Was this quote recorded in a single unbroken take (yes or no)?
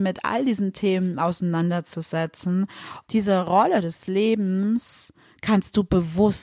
no